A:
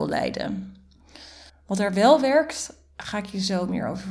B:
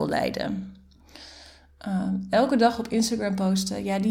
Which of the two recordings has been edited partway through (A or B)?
A